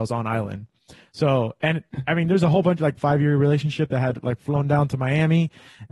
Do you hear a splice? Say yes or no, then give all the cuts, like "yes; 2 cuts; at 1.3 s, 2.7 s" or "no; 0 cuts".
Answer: yes; 1 cut; at 3.0 s